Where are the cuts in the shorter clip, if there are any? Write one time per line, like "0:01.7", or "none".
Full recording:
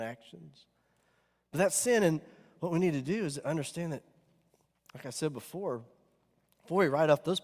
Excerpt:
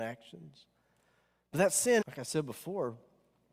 0:02.0